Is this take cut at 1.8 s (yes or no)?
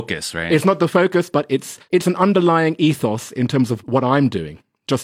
yes